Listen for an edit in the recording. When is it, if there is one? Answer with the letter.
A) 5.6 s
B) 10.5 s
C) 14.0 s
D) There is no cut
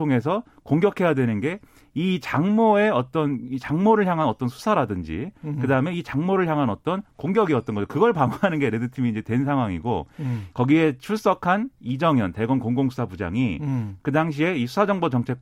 B